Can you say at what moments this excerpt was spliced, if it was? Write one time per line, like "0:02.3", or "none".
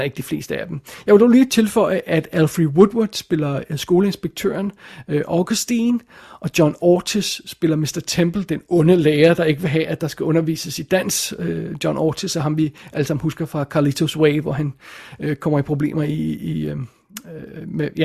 none

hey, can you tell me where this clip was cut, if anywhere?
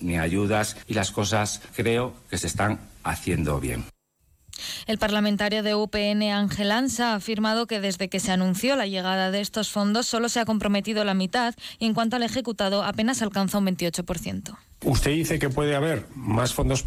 none

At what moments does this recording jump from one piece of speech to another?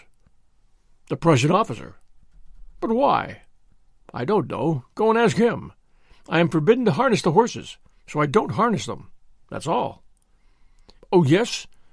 0:11.0

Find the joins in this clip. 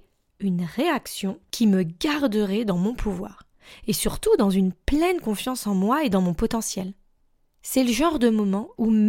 none

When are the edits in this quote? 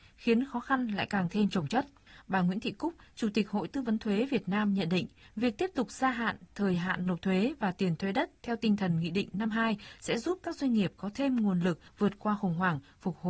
none

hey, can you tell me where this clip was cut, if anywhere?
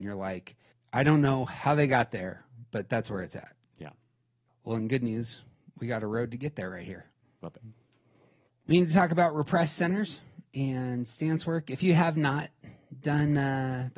none

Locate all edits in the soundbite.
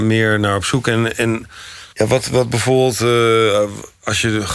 0:01.9

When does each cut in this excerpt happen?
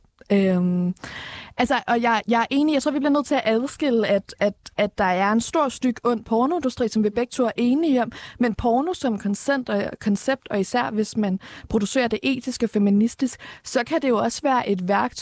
none

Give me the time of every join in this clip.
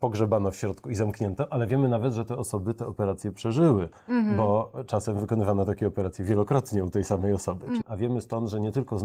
0:07.8

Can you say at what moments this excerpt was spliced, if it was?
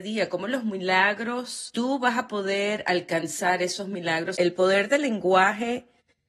0:04.4

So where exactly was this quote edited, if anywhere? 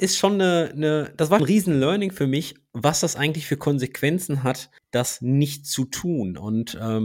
0:01.4

